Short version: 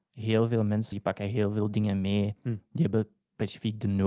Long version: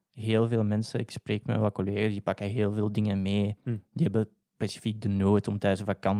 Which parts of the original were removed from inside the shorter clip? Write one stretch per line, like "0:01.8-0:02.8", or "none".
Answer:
0:00.9-0:02.1